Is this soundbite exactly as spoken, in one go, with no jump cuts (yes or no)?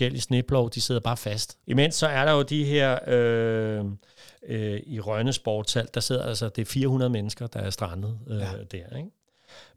no